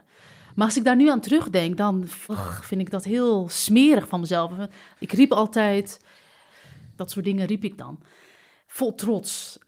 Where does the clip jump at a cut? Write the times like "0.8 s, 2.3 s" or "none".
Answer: 2.3 s, 5.0 s, 6.9 s